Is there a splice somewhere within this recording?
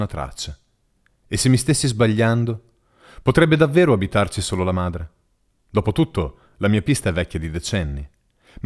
no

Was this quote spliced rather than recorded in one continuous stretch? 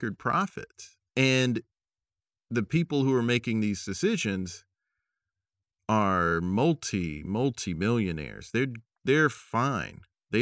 yes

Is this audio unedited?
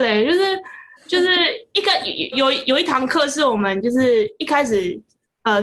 no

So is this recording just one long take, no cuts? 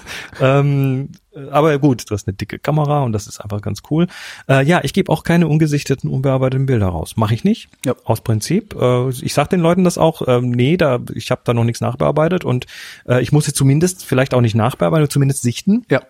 no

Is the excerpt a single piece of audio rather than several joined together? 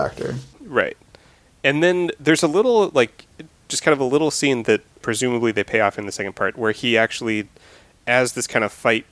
yes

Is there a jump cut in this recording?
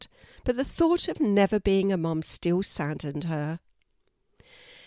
no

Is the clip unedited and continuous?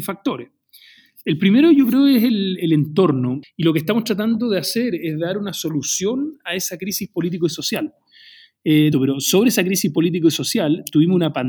no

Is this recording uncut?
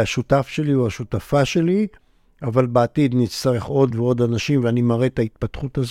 no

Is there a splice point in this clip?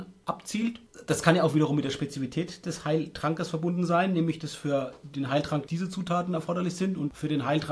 yes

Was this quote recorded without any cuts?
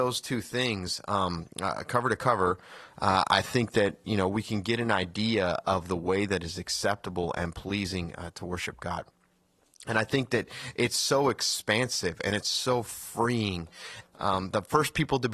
no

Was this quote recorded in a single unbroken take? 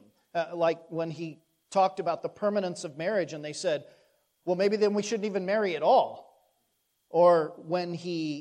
no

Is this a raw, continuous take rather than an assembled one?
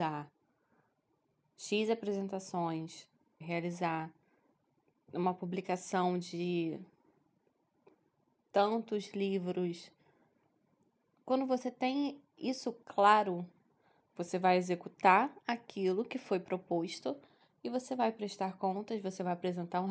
no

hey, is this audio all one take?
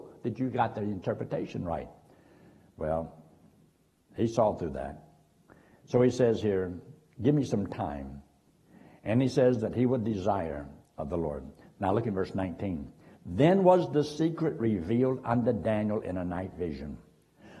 yes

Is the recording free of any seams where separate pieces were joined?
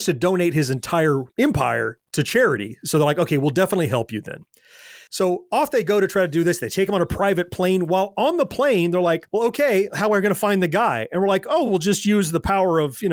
yes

